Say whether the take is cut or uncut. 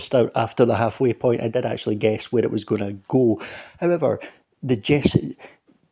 uncut